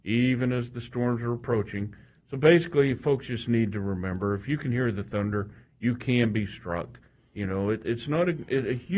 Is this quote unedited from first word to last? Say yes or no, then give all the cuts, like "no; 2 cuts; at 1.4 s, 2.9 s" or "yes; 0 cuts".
yes; 0 cuts